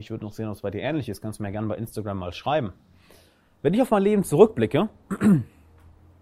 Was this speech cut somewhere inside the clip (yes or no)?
no